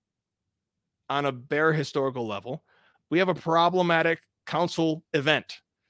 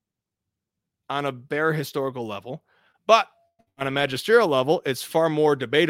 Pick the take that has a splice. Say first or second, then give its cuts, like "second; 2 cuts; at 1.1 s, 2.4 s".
first; 1 cut; at 3.0 s